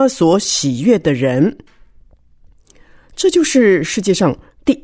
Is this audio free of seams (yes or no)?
yes